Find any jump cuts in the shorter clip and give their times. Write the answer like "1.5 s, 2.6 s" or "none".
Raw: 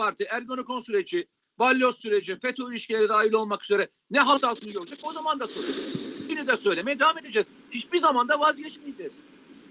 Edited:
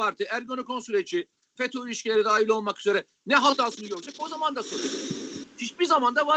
1.6 s, 5.4 s